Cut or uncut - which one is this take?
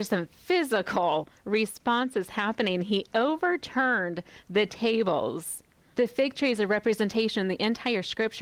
cut